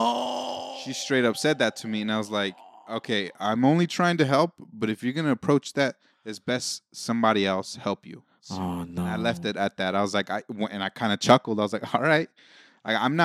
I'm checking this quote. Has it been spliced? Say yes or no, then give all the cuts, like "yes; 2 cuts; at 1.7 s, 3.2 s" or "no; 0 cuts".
no; 0 cuts